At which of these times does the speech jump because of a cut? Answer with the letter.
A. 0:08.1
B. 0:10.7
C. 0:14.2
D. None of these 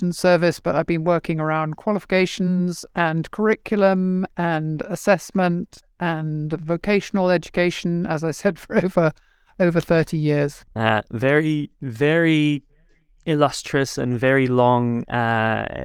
B